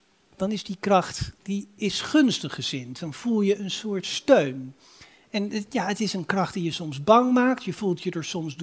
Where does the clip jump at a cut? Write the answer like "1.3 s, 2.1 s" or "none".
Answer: none